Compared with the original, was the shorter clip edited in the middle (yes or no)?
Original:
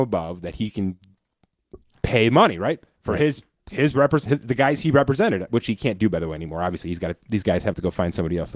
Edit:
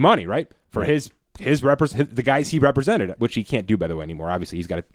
no